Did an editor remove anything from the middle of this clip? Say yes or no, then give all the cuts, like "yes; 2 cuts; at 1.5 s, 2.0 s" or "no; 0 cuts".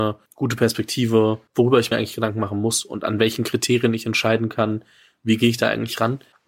no; 0 cuts